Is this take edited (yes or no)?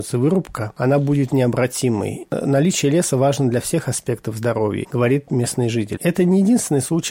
yes